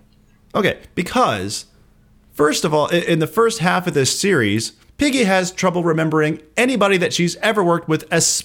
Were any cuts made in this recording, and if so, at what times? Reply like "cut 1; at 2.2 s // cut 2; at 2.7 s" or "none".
cut 1; at 4.9 s